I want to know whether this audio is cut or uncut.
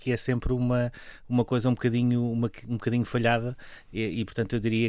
uncut